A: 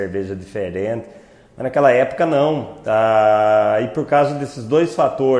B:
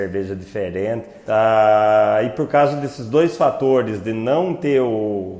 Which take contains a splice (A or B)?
B